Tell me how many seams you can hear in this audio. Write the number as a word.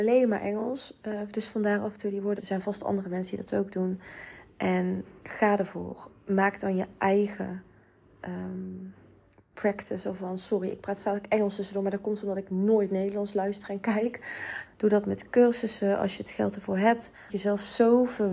three